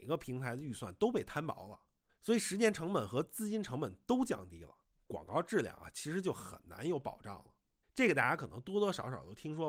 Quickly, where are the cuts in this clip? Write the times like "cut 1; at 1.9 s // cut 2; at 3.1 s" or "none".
cut 1; at 2.1 s // cut 2; at 7.8 s